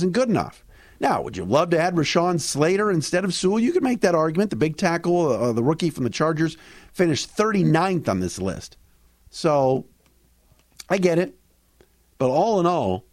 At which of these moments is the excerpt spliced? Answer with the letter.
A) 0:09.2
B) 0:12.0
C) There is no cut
A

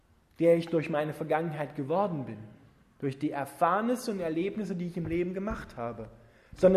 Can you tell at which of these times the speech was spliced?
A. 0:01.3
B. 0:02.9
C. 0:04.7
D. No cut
D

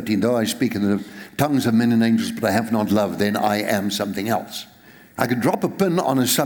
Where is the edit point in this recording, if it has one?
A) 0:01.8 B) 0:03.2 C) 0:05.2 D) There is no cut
C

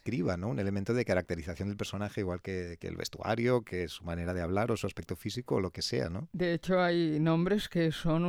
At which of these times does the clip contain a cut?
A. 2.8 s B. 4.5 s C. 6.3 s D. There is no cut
D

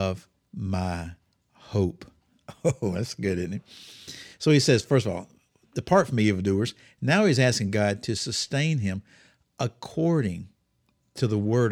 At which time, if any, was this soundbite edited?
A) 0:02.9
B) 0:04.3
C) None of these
C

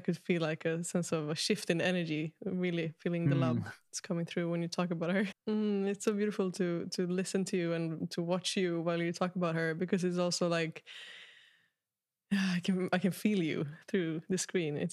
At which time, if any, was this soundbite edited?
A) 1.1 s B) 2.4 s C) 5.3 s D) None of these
C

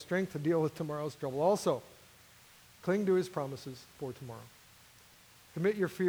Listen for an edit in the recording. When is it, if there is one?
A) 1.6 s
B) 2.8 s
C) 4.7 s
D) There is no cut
B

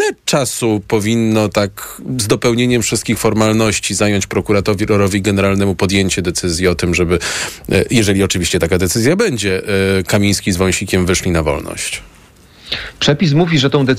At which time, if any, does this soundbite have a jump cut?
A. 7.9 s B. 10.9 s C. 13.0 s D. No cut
D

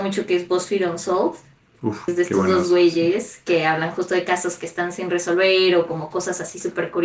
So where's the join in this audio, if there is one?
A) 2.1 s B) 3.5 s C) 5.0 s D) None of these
A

